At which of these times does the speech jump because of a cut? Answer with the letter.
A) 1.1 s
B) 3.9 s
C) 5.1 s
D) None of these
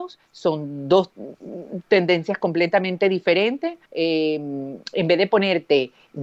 B